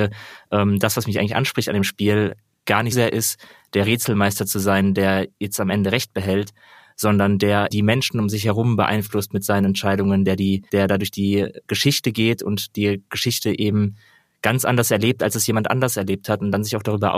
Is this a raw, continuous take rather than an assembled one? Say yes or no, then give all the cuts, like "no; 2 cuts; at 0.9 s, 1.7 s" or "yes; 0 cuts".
no; 3 cuts; at 2.9 s, 7.7 s, 10.7 s